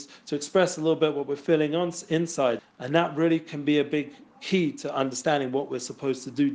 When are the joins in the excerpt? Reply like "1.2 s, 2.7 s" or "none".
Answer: 2.6 s